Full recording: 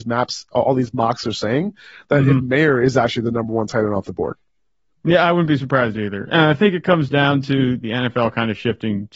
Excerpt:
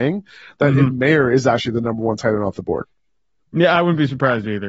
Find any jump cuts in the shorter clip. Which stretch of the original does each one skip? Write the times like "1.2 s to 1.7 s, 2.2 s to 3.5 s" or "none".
none